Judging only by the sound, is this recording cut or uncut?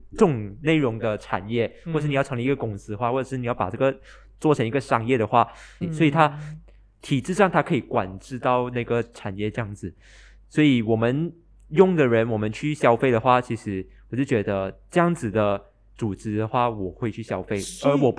cut